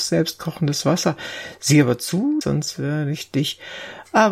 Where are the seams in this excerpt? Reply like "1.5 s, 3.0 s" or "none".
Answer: 2.4 s